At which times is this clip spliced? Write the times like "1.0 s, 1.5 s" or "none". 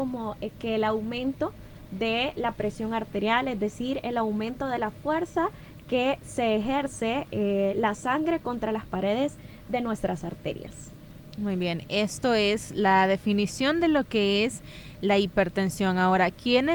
none